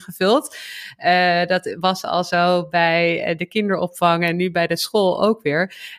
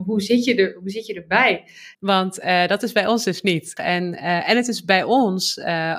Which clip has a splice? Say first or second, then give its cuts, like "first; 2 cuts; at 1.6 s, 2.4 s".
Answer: second; 2 cuts; at 1.9 s, 3.8 s